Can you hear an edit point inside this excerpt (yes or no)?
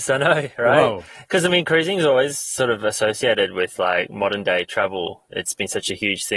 no